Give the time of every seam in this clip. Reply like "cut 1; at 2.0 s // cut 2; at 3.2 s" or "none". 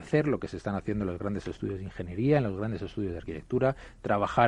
none